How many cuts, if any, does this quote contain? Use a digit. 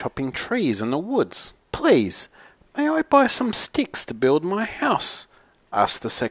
1